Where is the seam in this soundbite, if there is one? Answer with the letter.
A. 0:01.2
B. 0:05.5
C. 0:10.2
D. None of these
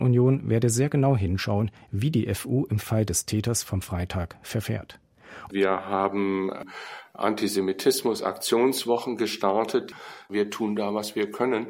B